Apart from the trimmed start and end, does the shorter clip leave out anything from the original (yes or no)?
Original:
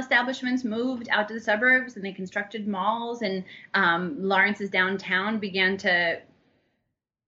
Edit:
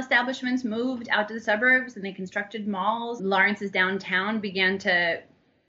yes